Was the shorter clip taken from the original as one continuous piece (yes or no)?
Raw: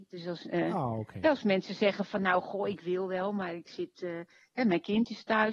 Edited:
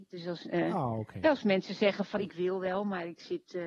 no